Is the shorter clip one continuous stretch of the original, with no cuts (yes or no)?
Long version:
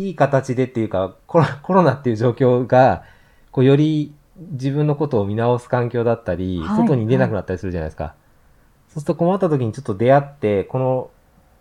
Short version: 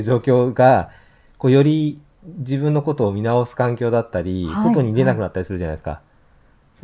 yes